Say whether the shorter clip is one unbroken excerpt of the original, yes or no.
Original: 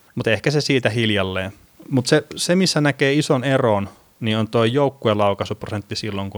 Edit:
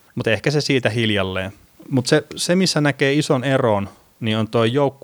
yes